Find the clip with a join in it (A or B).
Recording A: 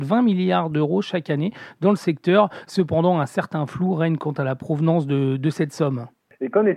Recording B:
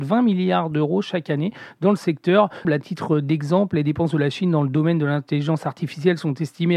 B